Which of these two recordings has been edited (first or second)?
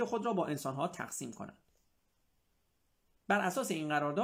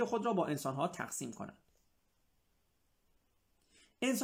first